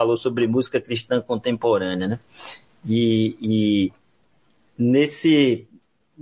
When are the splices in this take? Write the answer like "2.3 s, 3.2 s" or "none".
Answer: none